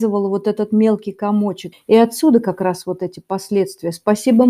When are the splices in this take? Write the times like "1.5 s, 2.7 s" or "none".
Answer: 1.7 s